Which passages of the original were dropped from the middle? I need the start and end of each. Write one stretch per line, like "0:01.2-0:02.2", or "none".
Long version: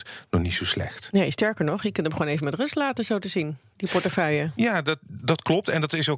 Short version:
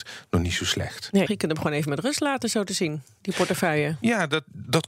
0:01.3-0:01.8

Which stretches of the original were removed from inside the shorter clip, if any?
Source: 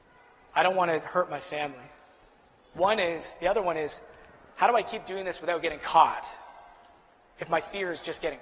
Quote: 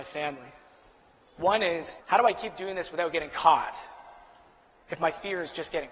0:03.4-0:04.5

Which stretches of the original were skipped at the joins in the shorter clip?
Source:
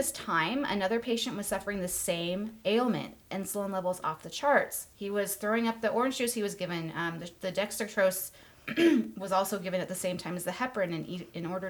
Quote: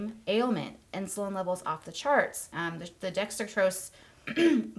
0:04.9-0:06.9

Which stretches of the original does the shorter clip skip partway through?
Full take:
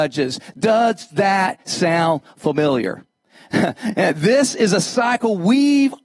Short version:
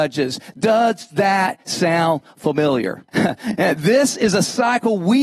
0:03.1-0:03.5

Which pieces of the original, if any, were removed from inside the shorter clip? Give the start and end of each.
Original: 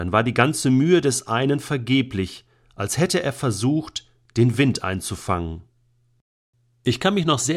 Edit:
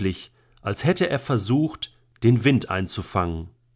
none

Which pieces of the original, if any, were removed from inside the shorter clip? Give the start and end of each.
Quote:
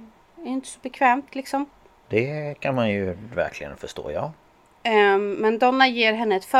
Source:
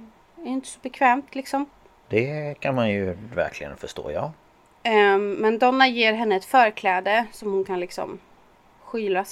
none

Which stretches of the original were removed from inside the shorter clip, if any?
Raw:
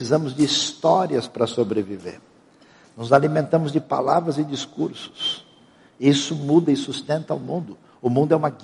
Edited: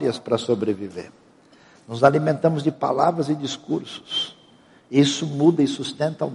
none

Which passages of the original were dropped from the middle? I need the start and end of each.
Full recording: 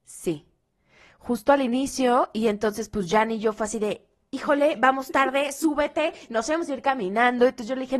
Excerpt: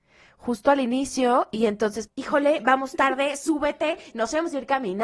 0:02.9-0:04.2

